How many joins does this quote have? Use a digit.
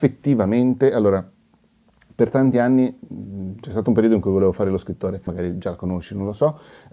1